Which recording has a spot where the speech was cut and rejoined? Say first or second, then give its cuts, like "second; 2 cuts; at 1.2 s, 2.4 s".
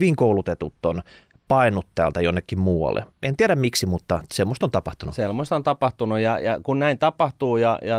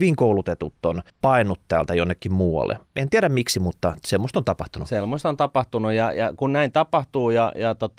second; 1 cut; at 1.1 s